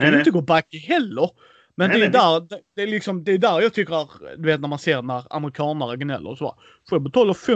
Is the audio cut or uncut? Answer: uncut